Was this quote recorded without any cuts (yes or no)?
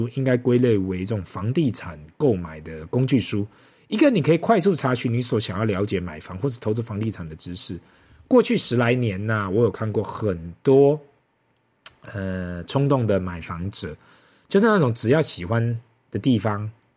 yes